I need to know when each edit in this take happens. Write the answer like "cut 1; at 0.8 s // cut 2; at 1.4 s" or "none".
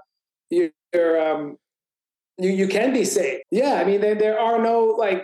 cut 1; at 3.4 s